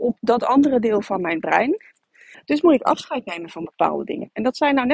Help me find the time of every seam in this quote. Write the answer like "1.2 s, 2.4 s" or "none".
2.3 s